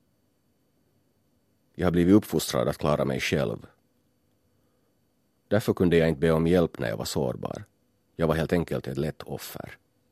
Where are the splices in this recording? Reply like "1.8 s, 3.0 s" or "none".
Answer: none